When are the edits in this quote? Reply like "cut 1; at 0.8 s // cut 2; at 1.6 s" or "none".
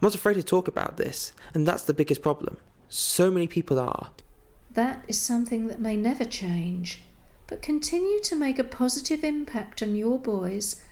cut 1; at 4.6 s

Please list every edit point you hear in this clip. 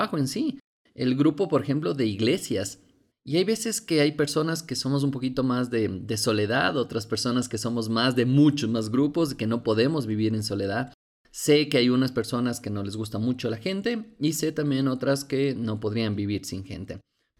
cut 1; at 3.1 s // cut 2; at 11.1 s

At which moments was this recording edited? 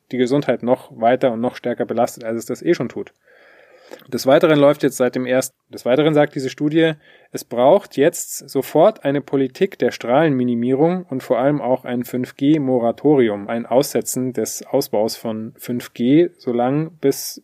cut 1; at 4.0 s // cut 2; at 5.5 s // cut 3; at 13.5 s

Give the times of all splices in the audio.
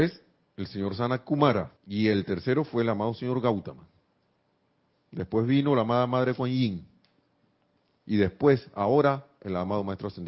cut 1; at 1.8 s

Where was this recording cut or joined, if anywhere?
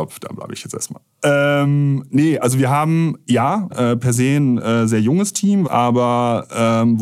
cut 1; at 3.7 s // cut 2; at 5.6 s

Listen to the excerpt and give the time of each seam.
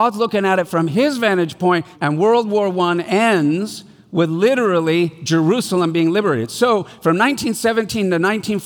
cut 1; at 1.9 s

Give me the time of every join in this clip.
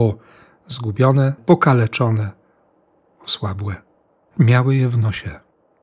cut 1; at 1.4 s

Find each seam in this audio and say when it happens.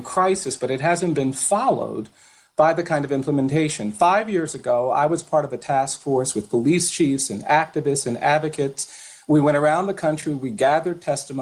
none

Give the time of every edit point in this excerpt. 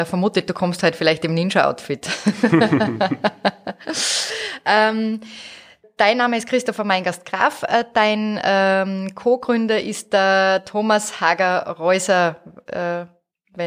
cut 1; at 5.8 s

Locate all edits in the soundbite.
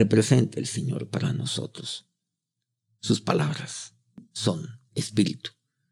none

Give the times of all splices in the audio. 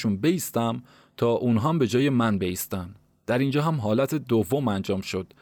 none

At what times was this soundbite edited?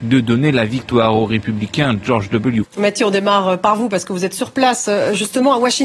cut 1; at 2.6 s

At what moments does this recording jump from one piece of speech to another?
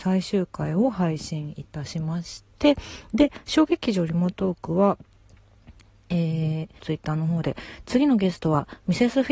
cut 1; at 6.8 s

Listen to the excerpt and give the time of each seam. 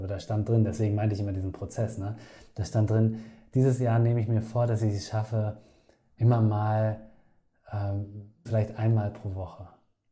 cut 1; at 6.2 s // cut 2; at 8.5 s

